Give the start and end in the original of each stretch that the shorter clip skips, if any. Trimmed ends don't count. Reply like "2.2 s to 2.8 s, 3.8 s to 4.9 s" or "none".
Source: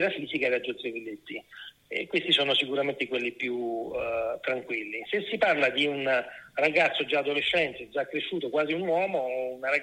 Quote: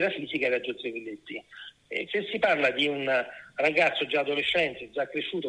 2.1 s to 5.1 s